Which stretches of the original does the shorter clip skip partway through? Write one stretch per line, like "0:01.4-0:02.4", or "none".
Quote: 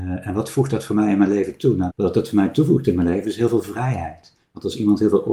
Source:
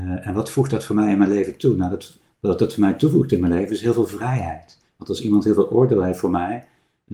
0:01.9-0:02.3